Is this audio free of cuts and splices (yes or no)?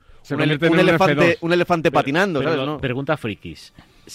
no